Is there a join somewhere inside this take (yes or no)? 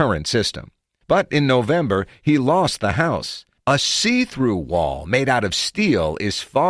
yes